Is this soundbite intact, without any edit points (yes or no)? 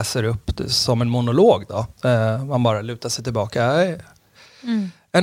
yes